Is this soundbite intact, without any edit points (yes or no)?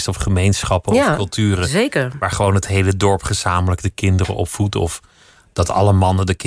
yes